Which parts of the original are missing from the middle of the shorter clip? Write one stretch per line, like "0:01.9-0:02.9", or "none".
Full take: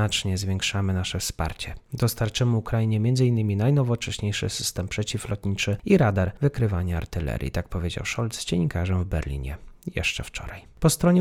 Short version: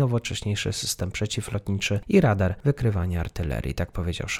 none